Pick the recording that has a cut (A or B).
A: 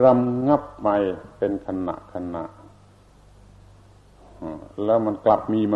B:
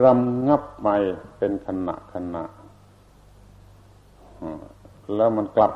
A